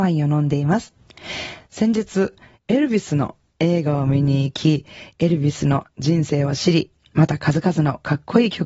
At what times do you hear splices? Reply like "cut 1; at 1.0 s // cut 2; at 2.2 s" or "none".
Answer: none

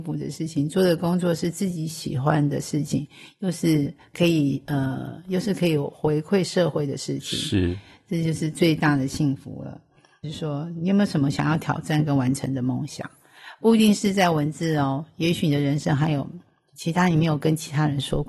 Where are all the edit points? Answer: cut 1; at 10.2 s

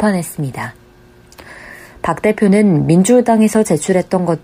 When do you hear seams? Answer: none

